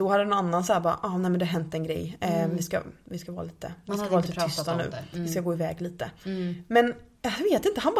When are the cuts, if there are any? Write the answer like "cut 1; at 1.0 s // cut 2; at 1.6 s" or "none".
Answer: none